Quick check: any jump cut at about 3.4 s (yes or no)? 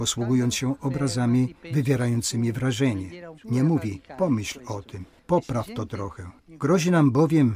yes